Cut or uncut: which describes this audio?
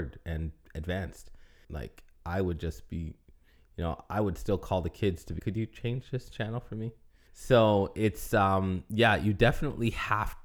cut